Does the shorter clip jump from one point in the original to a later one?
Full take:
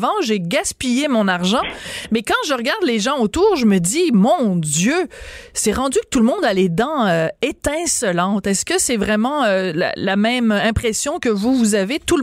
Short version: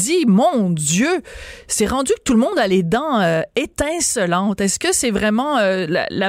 no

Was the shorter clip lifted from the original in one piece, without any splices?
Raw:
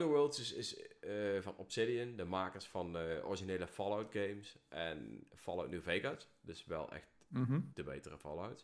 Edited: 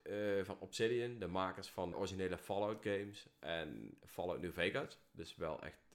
no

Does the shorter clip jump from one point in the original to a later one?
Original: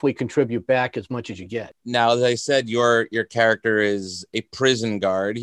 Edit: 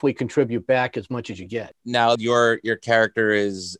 yes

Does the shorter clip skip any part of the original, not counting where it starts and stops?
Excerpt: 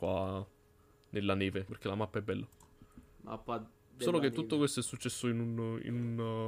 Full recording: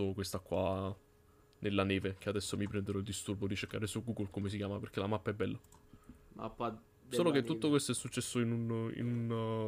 yes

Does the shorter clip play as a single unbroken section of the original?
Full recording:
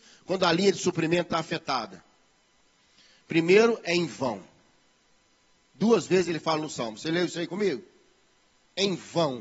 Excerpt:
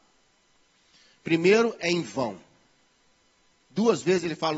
yes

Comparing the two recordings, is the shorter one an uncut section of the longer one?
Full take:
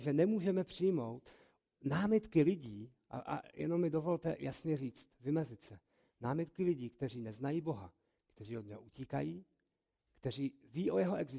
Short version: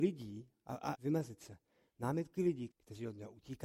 no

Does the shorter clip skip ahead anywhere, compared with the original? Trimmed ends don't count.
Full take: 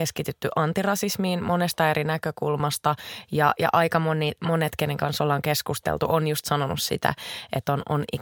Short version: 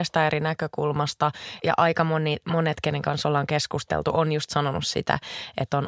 yes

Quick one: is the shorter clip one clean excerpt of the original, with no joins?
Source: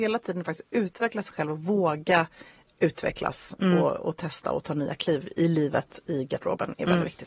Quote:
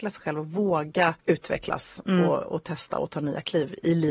no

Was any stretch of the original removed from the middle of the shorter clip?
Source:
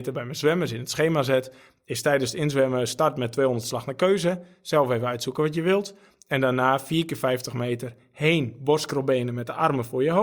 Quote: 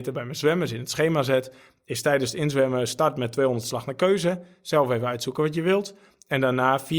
no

